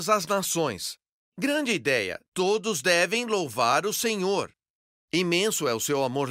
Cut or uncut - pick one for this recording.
cut